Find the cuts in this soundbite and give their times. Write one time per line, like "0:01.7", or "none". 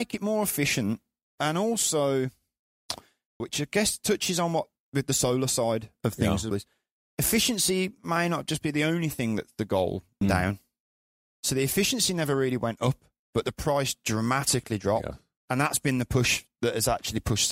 0:03.4
0:06.5
0:10.2